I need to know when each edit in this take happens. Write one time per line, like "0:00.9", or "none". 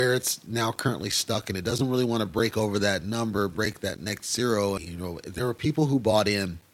0:04.8